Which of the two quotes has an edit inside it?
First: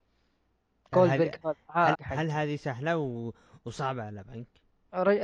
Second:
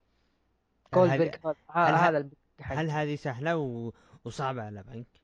first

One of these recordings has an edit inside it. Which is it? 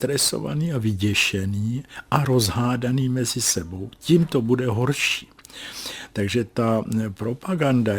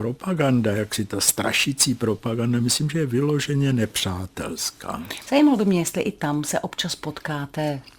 second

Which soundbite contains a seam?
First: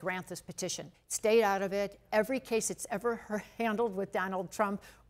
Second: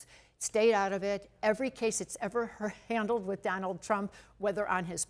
first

